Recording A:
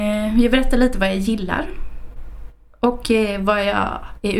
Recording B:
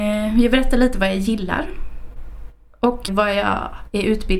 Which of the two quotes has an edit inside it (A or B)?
B